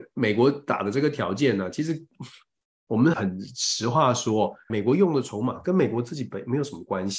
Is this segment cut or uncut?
cut